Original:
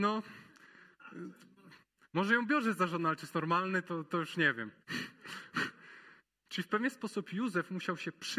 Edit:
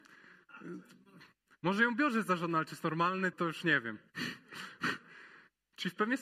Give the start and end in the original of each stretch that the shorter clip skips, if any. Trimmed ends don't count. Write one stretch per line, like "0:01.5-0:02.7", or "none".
0:03.8-0:04.1